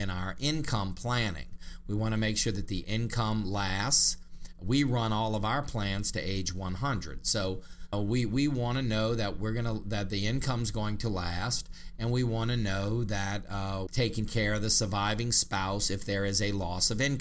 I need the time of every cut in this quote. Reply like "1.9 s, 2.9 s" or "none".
7.9 s, 13.9 s

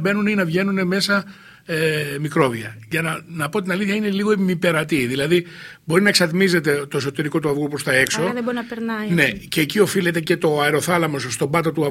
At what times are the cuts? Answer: none

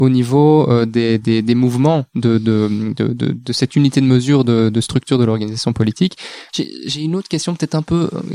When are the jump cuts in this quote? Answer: 6.5 s

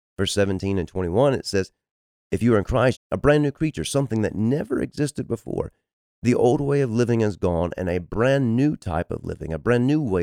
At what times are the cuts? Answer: 2.9 s

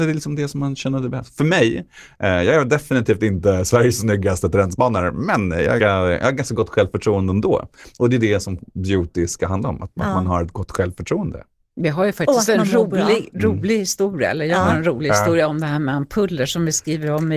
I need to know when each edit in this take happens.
5.8 s

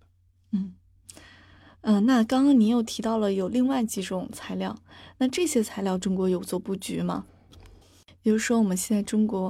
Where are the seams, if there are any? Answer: 7.8 s

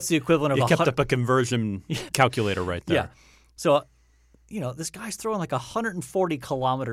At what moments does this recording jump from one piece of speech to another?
2.1 s

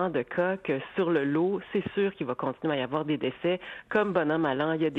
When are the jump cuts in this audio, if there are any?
none

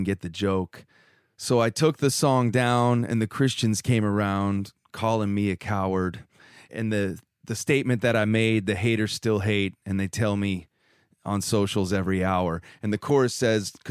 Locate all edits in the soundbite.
none

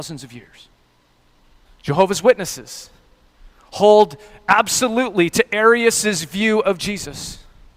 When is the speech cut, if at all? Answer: 1.7 s

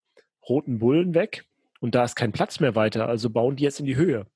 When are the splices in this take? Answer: none

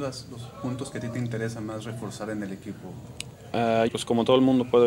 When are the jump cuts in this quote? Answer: 3.9 s

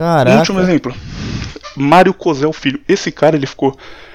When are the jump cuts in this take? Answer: none

